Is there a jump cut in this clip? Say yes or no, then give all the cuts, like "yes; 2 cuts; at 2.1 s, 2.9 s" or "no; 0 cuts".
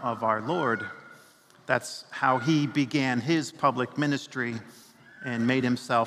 no; 0 cuts